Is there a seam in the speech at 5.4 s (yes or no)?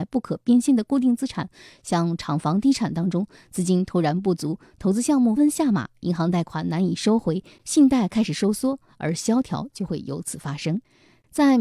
yes